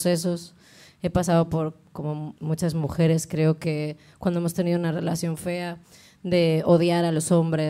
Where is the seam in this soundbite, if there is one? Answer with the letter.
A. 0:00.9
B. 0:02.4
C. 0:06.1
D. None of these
B